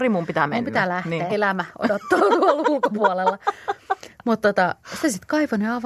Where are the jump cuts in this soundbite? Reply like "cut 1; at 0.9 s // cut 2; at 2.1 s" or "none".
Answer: cut 1; at 1.3 s